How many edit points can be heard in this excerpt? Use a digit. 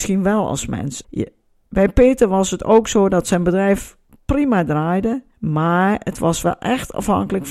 2